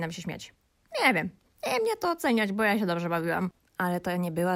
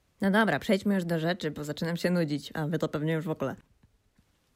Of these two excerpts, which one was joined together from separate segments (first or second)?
first